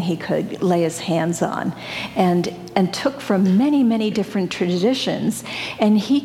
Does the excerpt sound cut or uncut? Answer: uncut